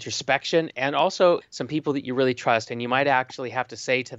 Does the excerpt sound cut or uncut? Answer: cut